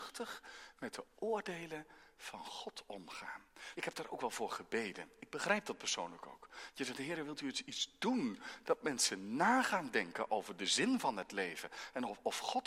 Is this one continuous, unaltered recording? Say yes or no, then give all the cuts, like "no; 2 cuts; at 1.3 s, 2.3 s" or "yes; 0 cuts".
no; 2 cuts; at 3.7 s, 8.6 s